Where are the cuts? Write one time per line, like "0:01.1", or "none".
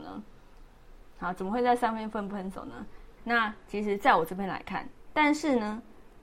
0:03.2
0:05.1